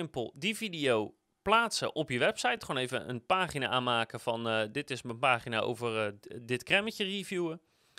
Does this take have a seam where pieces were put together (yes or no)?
no